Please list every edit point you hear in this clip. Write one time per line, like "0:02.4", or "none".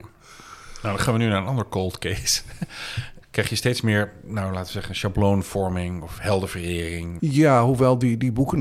0:03.2
0:07.2